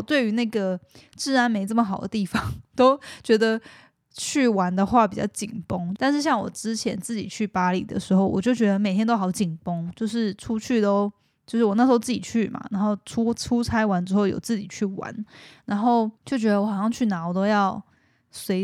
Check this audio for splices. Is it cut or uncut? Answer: cut